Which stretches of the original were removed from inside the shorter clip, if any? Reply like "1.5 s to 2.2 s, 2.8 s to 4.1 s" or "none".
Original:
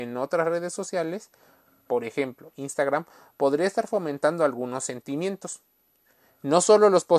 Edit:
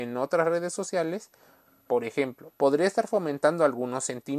2.5 s to 3.3 s